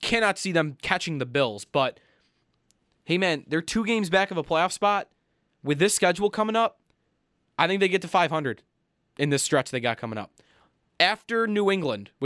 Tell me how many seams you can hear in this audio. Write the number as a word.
zero